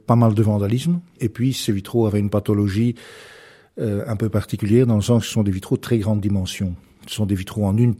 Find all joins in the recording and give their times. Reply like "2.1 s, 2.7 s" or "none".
none